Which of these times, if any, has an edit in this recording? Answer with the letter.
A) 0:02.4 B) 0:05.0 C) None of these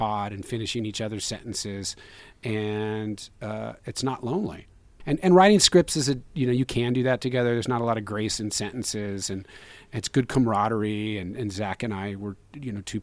B